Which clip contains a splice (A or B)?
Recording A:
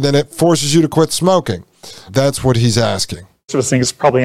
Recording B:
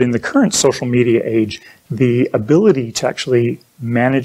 A